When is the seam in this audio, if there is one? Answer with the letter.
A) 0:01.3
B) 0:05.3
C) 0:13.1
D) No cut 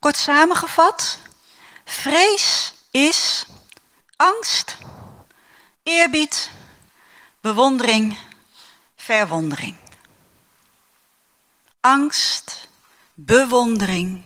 C